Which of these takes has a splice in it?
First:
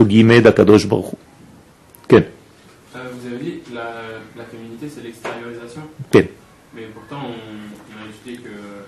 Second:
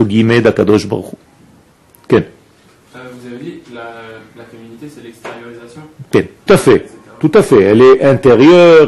second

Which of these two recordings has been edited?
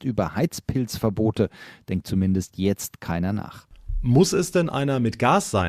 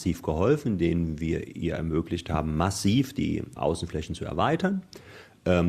second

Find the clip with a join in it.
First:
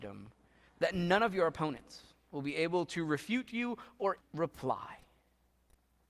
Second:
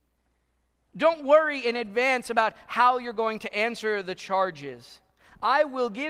first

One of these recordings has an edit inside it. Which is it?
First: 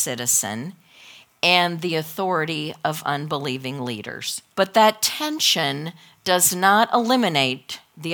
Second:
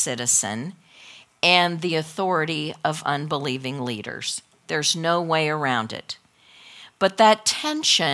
first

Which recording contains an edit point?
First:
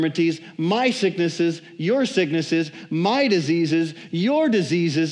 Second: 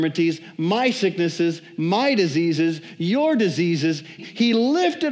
second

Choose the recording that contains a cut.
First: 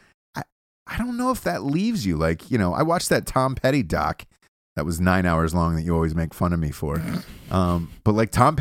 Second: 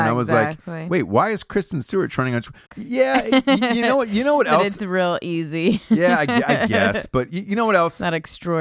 second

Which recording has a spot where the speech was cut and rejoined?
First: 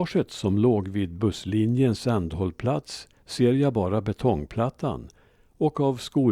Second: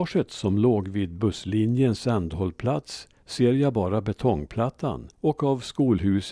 second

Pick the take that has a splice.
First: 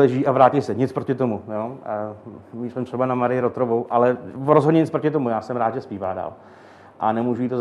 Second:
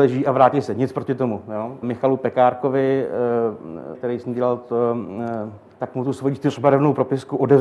second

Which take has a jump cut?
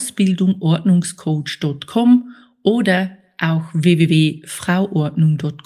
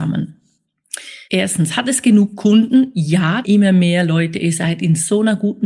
second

